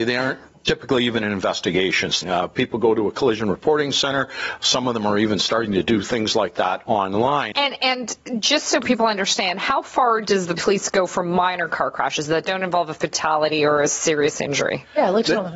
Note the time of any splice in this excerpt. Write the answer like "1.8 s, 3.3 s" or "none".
2.2 s, 7.5 s

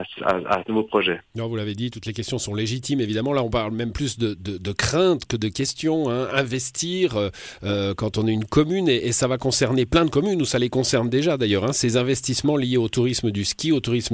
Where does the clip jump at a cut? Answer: none

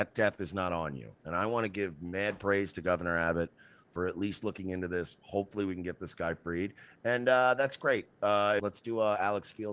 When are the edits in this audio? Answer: 8.6 s

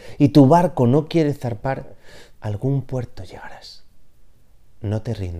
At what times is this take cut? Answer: 2.3 s

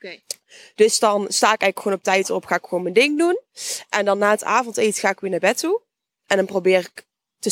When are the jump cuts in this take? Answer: none

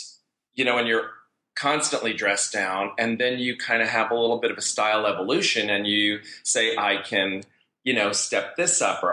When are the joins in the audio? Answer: none

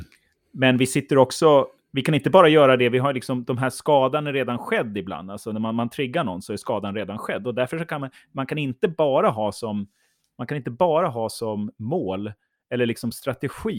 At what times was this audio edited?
none

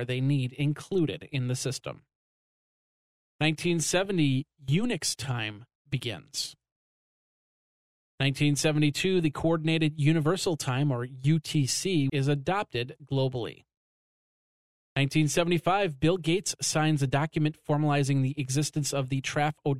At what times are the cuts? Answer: 12.1 s

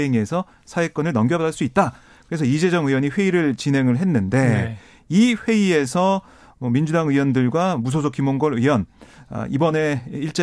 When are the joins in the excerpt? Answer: none

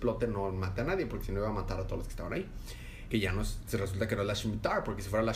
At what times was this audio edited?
3.1 s

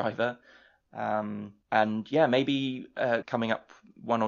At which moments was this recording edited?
1.6 s, 3.2 s

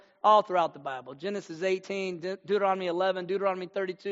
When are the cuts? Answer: none

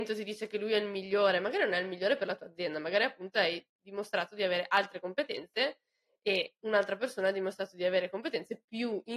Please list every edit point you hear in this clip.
none

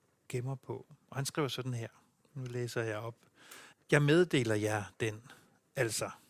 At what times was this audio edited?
3.7 s

